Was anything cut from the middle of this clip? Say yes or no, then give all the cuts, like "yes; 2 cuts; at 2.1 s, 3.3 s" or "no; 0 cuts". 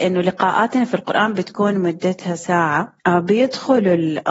yes; 1 cut; at 3.0 s